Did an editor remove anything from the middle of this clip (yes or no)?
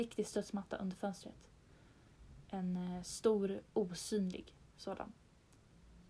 no